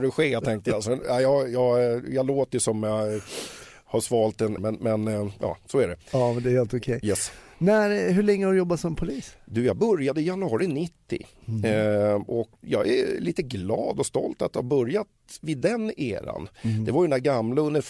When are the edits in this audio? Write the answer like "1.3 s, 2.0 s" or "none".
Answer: 4.6 s, 12.6 s